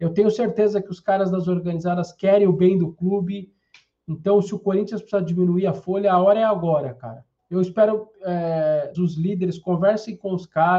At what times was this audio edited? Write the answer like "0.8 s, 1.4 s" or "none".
7.4 s, 8.9 s